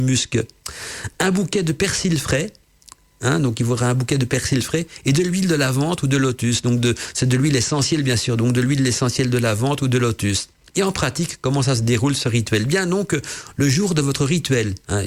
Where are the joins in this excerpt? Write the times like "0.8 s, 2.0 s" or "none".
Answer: none